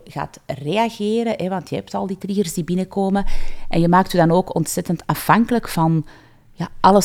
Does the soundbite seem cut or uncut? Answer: uncut